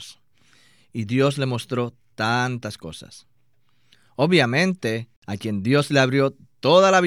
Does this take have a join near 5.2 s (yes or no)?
yes